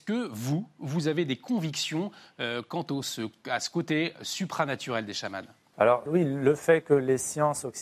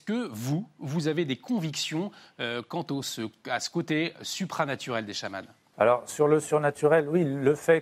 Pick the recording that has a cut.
first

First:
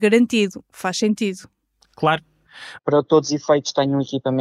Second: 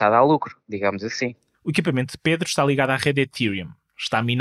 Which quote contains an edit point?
first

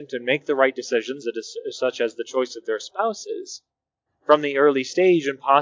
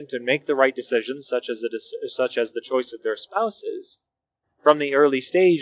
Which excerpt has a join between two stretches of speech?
first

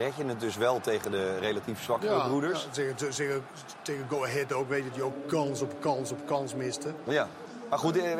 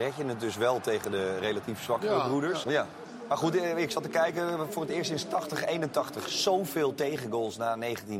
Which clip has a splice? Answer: second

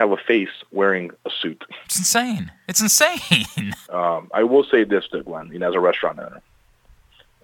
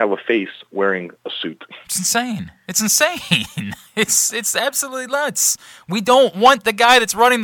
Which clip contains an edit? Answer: first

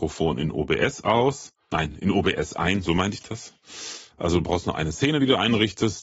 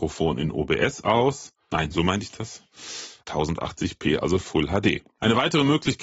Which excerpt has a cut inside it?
second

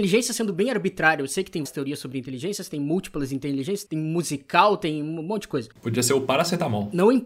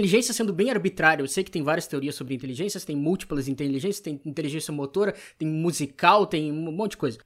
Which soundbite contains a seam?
first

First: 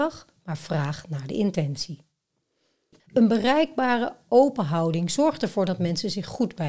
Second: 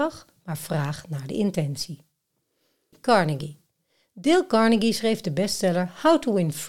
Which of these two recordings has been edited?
first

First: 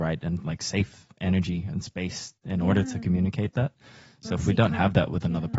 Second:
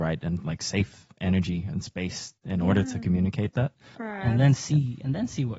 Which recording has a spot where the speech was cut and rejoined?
second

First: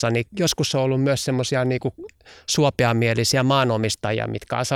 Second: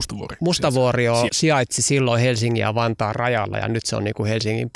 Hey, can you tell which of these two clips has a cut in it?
second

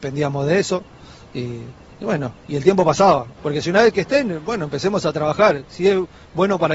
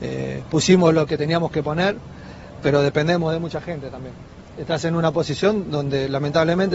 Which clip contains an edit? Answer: first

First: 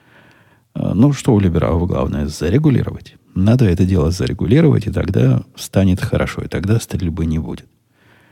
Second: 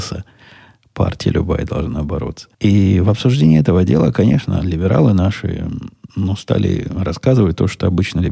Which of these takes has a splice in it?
second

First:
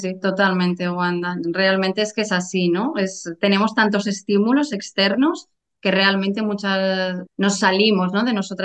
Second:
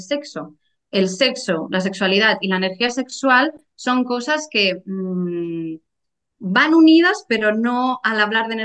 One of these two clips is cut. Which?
first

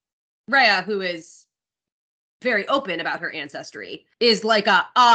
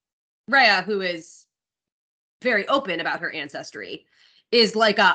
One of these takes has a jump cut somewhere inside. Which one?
first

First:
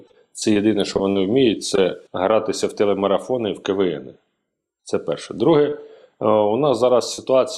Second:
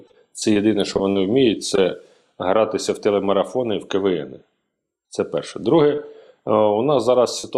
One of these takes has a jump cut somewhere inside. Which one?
first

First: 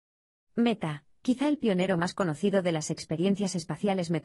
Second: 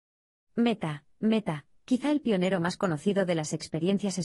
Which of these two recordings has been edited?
first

